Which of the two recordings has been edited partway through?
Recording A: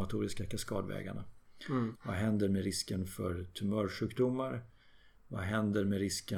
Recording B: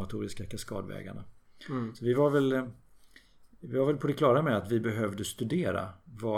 A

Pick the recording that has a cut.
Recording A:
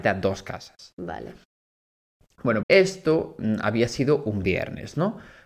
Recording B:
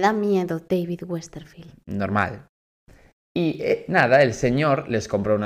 A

